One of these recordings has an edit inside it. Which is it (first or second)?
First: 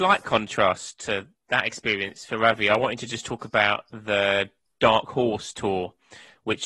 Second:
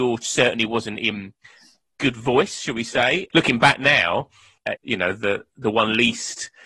second